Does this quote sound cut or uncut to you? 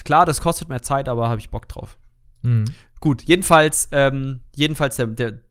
uncut